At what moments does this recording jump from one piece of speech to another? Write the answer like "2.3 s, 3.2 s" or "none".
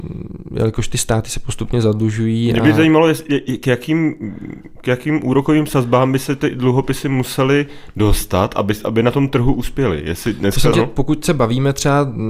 10.7 s